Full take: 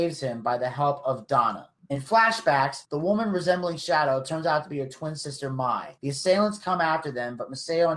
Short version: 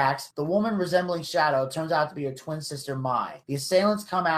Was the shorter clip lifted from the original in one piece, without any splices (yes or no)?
yes